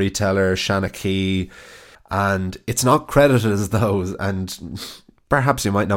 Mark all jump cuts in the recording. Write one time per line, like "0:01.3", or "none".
0:01.9